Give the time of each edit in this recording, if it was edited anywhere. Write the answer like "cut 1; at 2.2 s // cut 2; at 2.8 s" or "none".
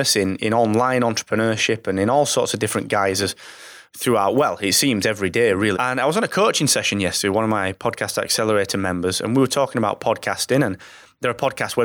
cut 1; at 5.7 s